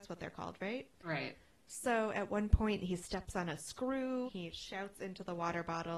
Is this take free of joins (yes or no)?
no